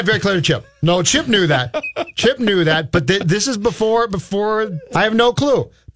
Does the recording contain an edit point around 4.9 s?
yes; 1 cut; at 4.9 s

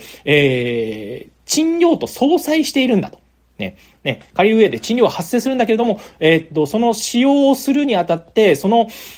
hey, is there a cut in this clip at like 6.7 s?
no; 1 cut; at 3.9 s

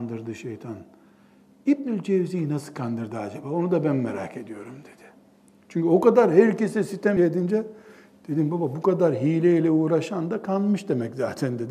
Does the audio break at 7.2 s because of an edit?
yes; 1 cut; at 7.2 s

